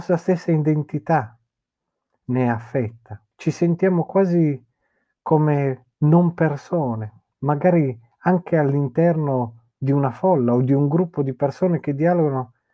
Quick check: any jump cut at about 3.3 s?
yes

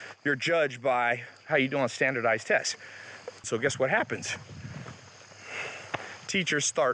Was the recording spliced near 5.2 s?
no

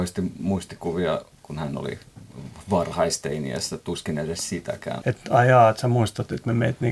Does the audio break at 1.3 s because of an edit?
yes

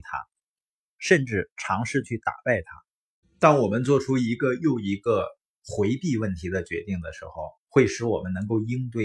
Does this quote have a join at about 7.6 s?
yes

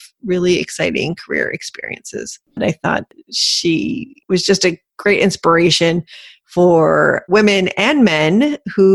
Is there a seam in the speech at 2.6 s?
yes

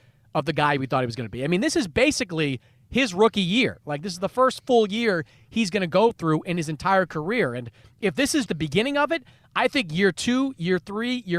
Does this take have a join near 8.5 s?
yes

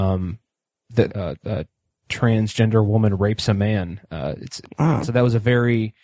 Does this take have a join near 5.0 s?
yes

